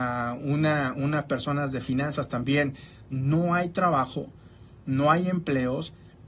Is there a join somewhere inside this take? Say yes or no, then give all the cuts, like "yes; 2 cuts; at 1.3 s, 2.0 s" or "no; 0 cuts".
yes; 1 cut; at 3.1 s